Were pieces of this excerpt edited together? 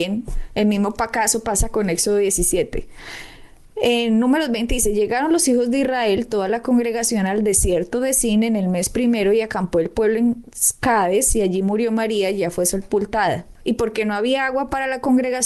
no; 0 cuts

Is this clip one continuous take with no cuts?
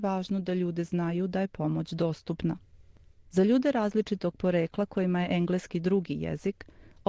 yes; 0 cuts

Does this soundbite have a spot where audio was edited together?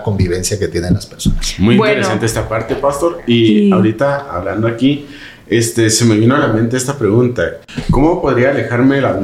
no; 0 cuts

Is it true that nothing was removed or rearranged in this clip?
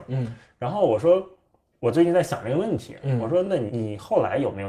yes; 0 cuts

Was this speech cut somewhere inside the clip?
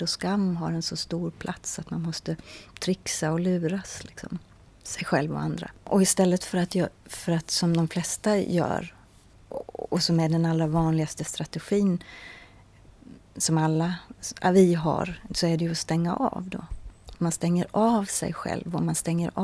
no; 0 cuts

